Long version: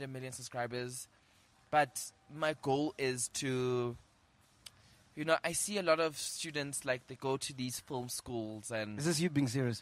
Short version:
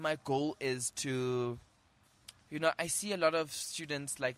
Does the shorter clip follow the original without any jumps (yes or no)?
no